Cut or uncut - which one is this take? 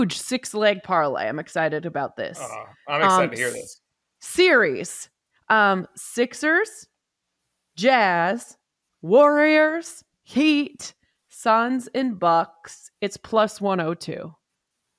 uncut